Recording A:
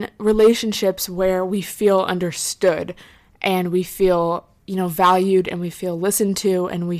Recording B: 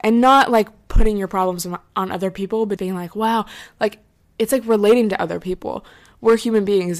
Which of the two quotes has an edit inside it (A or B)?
B